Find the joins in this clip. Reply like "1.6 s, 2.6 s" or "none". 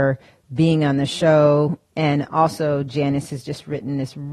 1.9 s

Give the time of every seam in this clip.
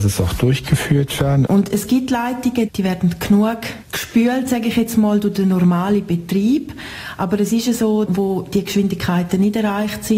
1.5 s, 8.1 s

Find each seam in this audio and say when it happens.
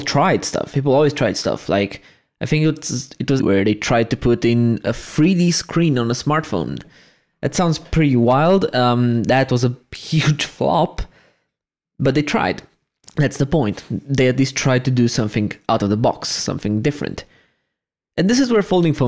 3.4 s

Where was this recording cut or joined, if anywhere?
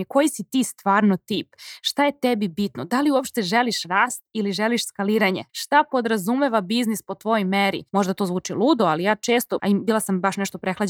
5.5 s, 7.9 s, 9.6 s

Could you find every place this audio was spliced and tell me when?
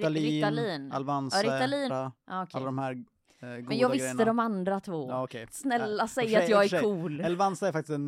1.9 s

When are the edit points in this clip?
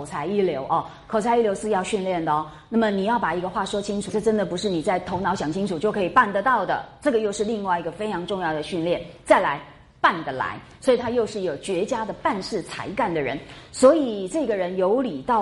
4.1 s

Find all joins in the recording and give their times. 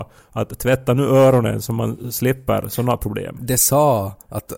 3.4 s

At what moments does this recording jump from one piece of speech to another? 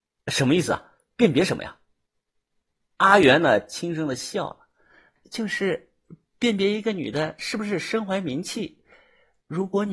5.2 s

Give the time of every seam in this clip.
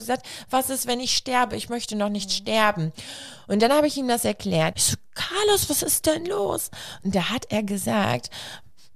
4.7 s

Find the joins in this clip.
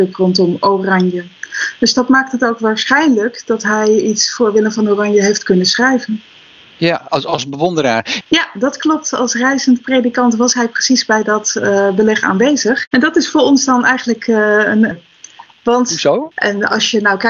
8.2 s, 14.9 s, 16.3 s

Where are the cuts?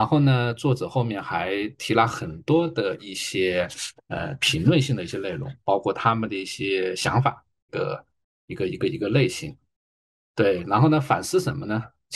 7.7 s

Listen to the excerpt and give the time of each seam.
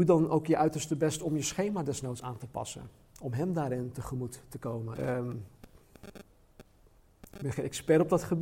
4.9 s

